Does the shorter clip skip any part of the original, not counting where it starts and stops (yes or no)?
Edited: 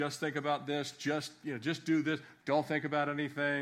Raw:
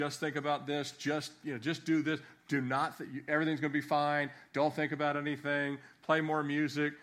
yes